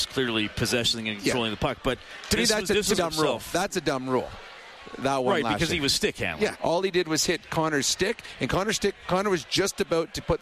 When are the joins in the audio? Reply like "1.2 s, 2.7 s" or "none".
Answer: 3.0 s, 6.5 s